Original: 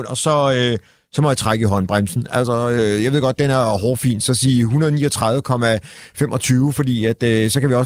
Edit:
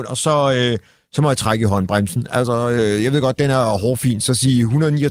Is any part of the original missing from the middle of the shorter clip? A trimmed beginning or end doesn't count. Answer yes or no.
no